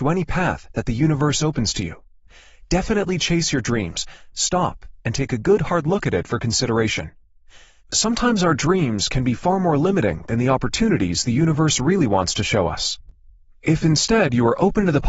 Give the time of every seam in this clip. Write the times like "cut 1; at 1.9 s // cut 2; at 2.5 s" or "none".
cut 1; at 4.3 s // cut 2; at 7.8 s